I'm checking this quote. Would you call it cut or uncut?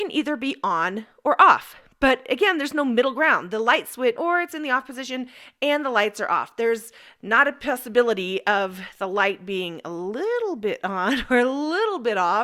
cut